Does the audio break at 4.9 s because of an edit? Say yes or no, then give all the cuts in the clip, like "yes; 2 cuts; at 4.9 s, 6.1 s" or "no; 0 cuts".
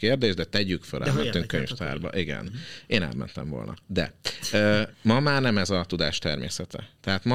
yes; 1 cut; at 4.9 s